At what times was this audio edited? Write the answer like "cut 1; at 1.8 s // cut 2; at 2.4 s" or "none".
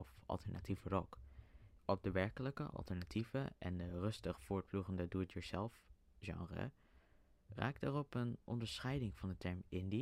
cut 1; at 1.8 s